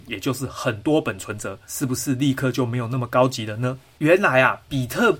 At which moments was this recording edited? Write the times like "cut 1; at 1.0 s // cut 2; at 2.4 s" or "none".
cut 1; at 1.7 s